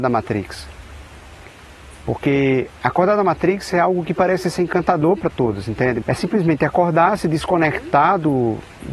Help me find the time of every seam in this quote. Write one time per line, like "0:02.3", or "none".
0:02.8
0:06.0